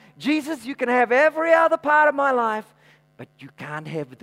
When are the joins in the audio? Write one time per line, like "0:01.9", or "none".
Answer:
none

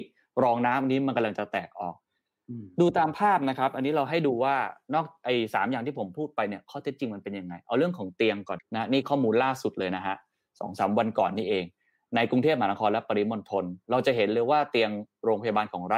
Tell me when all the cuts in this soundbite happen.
0:08.6

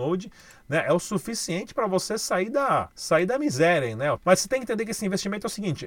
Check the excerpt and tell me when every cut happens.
0:02.9
0:04.2

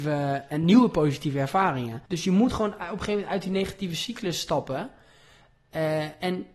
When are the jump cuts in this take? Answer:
0:02.1

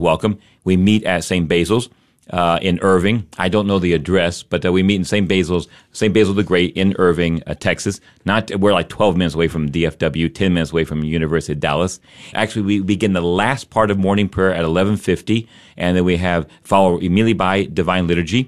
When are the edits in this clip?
0:12.3

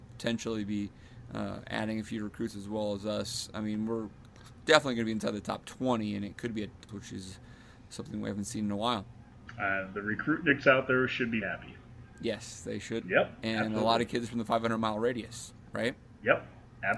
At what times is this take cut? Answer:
0:06.9
0:11.4
0:13.0

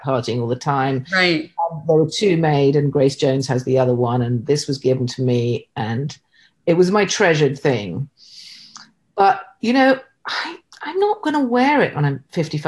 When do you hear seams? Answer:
none

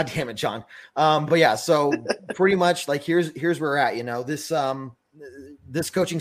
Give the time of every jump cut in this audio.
none

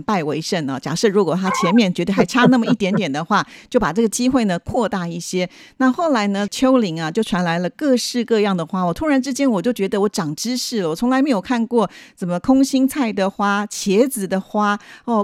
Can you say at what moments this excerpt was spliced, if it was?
none

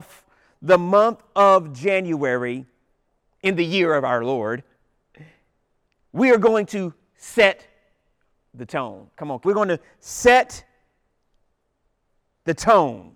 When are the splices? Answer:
none

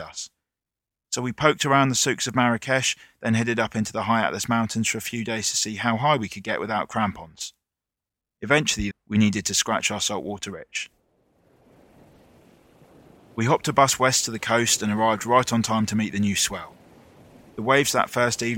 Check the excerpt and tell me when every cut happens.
0:08.9

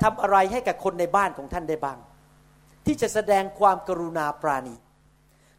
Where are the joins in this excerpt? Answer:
none

